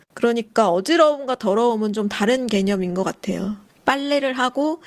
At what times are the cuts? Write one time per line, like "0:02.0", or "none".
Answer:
0:03.7